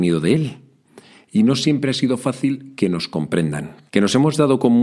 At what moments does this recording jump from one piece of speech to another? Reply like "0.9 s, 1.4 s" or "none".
3.9 s